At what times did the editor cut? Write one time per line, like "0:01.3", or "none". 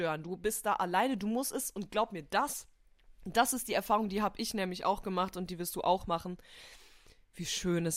none